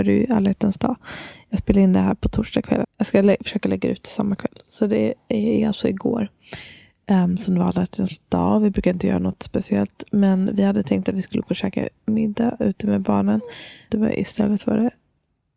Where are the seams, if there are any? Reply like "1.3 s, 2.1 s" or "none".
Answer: 2.8 s, 13.9 s